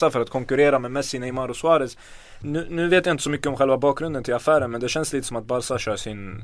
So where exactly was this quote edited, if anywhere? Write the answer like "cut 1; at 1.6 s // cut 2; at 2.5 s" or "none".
cut 1; at 2.4 s